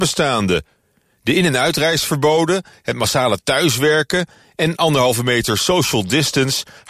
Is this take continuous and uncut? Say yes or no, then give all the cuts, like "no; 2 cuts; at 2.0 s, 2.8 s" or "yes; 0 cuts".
yes; 0 cuts